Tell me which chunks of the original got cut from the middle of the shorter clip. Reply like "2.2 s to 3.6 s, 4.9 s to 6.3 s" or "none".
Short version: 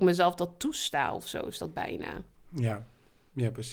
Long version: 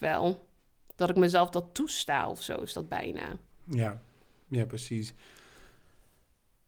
none